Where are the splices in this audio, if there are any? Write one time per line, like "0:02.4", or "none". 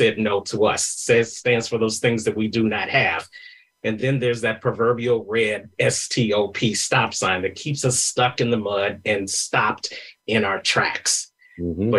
none